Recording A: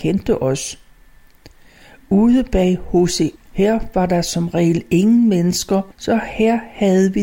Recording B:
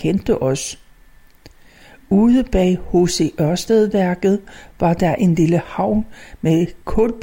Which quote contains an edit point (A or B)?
A